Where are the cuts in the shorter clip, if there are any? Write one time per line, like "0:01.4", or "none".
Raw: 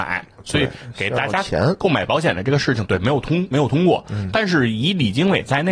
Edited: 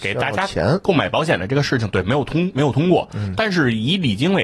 none